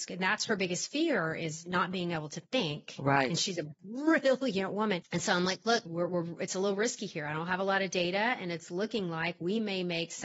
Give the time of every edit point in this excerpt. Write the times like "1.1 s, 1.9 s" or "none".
5.9 s